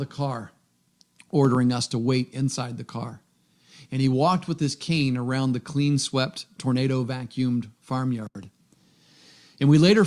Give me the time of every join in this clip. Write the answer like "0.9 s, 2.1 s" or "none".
none